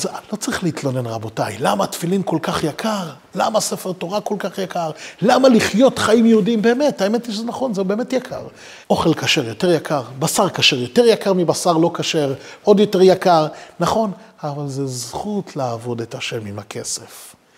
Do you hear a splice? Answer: yes; 2 cuts; at 8.8 s, 12.6 s

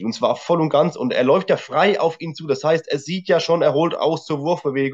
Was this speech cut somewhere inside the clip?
no; 0 cuts

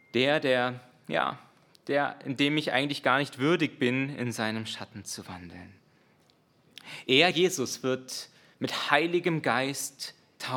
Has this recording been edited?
no; 0 cuts

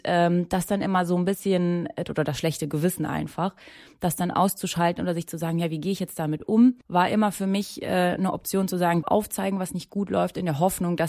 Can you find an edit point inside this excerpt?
yes; 2 cuts; at 6.8 s, 9.0 s

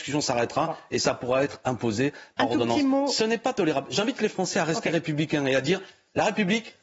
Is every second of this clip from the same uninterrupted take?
yes; 0 cuts

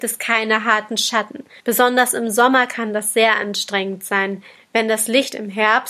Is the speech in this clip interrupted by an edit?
yes; 2 cuts; at 1.6 s, 4.6 s

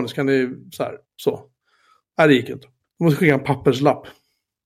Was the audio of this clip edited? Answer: yes; 1 cut; at 1.0 s

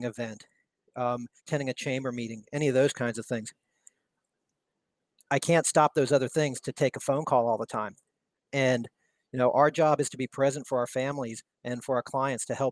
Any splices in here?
yes; 1 cut; at 1.4 s

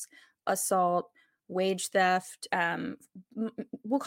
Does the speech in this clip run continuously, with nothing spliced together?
no; 1 cut; at 2.5 s

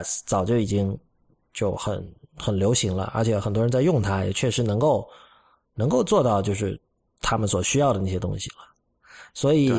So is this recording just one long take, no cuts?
yes; 0 cuts

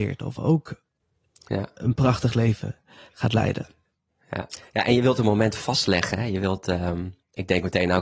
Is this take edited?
no; 0 cuts

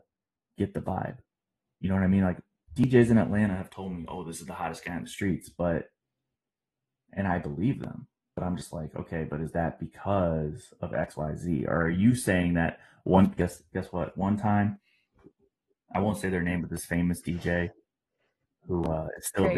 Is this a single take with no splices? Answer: no; 1 cut; at 13.4 s

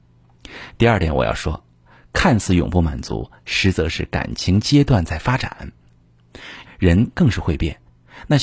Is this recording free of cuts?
no; 1 cut; at 6.6 s

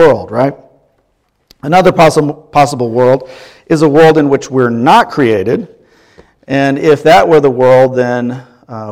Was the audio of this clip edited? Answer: no; 0 cuts

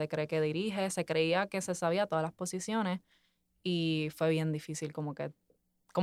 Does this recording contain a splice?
yes; 1 cut; at 0.9 s

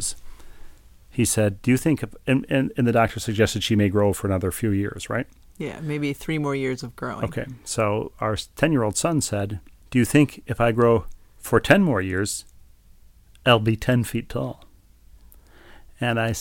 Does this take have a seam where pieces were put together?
no; 0 cuts

